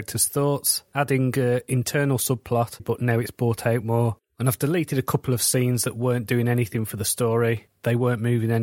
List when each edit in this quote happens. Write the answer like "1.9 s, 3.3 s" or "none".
2.8 s